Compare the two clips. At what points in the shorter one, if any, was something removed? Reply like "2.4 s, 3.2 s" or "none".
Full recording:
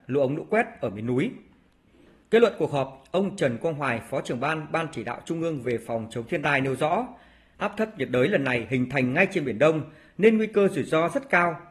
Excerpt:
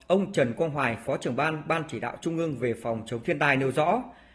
none